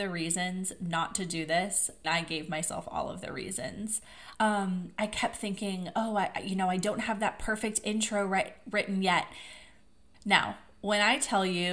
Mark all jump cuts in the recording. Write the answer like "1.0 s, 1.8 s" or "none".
2.0 s, 4.3 s, 10.1 s